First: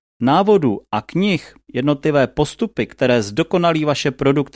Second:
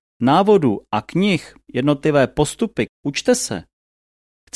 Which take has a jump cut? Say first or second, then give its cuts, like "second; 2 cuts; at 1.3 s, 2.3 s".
second; 1 cut; at 2.9 s